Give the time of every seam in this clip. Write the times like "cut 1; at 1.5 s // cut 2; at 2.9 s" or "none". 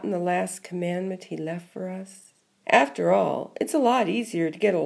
cut 1; at 2.6 s